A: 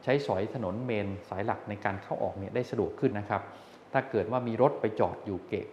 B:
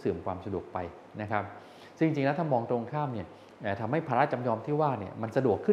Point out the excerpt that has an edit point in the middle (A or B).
A